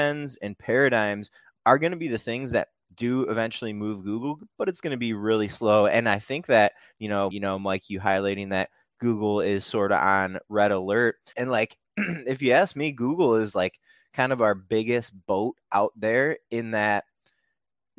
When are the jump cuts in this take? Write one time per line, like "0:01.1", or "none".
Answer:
0:07.3
0:11.3